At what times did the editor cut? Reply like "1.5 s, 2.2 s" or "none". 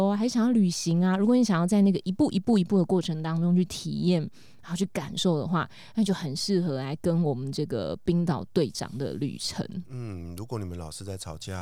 none